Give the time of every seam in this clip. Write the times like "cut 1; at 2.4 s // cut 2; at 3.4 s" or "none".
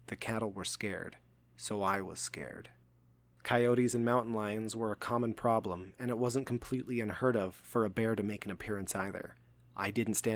none